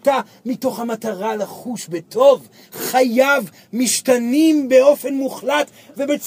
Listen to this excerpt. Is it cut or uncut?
uncut